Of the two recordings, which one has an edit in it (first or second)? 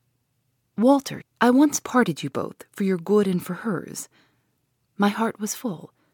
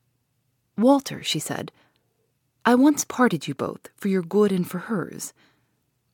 first